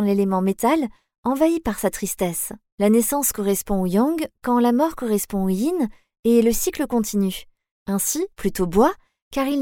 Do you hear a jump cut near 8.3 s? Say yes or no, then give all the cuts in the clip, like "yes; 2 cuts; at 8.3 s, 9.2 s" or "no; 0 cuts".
yes; 2 cuts; at 2.7 s, 8.3 s